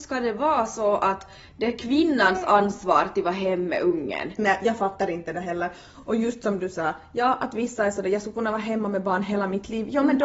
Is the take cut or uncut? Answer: uncut